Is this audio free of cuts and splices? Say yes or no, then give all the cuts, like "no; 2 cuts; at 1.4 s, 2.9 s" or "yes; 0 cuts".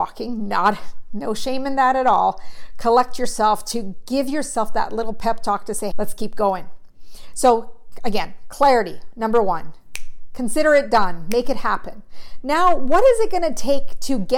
no; 1 cut; at 5.9 s